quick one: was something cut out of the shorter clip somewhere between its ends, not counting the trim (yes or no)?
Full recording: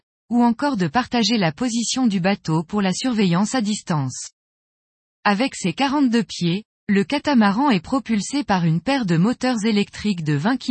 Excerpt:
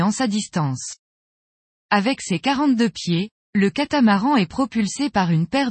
no